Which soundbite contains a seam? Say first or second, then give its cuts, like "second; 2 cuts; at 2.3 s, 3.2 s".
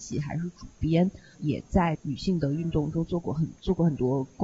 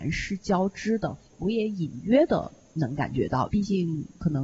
second; 1 cut; at 3.5 s